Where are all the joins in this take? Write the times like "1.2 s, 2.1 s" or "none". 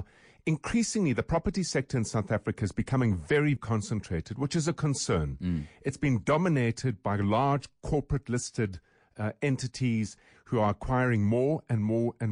3.6 s